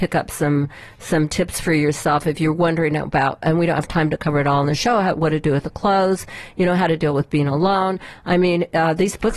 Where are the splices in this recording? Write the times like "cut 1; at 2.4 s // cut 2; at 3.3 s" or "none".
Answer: none

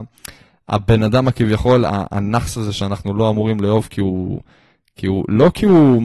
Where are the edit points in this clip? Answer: none

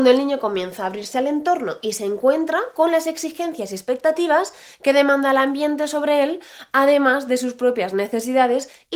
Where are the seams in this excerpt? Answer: none

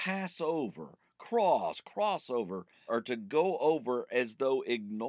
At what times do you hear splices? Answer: cut 1; at 2.9 s

